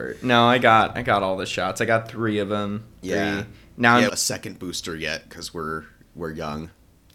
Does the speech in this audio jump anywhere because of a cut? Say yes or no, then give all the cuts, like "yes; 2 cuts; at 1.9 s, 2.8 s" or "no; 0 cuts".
yes; 1 cut; at 4.1 s